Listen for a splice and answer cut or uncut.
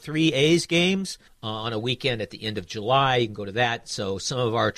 cut